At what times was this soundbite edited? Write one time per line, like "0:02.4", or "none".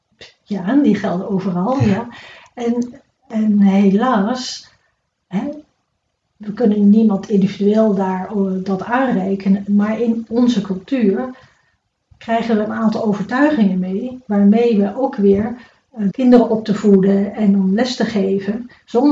0:16.1